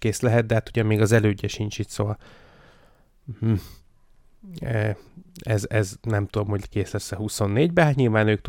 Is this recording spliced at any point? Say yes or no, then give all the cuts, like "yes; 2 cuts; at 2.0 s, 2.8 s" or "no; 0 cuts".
no; 0 cuts